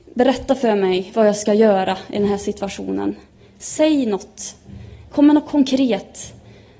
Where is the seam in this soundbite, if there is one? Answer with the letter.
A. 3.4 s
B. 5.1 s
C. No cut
B